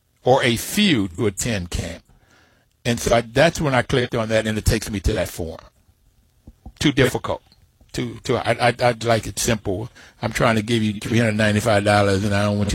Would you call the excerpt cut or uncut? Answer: uncut